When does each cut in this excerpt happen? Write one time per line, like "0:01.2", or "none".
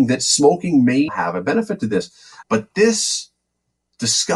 0:01.1
0:02.4